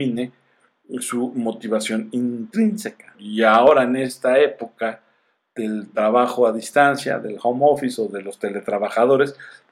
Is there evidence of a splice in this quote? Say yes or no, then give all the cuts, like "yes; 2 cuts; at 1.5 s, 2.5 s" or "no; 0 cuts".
yes; 1 cut; at 3.1 s